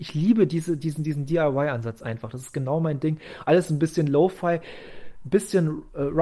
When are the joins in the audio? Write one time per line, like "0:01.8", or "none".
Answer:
none